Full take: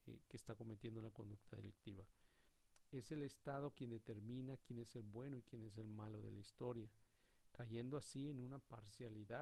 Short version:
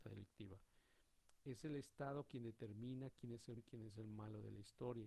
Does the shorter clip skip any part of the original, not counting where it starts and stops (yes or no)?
yes